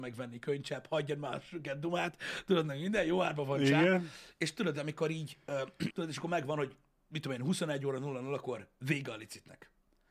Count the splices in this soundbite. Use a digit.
1